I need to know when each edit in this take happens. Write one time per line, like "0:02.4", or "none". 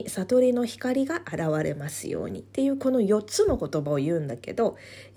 0:02.5